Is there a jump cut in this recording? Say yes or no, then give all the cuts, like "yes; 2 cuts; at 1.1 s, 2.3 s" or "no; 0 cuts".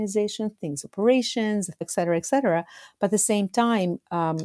yes; 1 cut; at 1.8 s